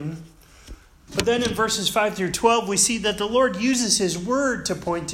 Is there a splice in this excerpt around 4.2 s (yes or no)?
no